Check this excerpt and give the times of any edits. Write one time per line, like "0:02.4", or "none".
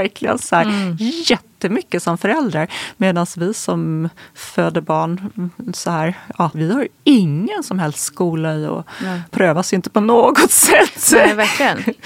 0:06.5
0:09.3